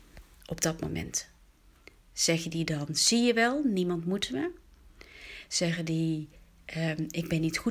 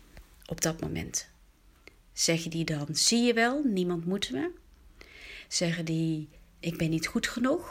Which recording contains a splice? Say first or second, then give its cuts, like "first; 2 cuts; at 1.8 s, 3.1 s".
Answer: second; 1 cut; at 6.6 s